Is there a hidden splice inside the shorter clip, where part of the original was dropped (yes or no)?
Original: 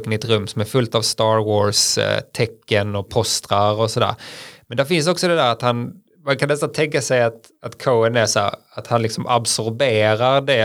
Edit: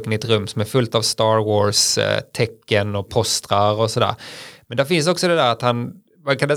no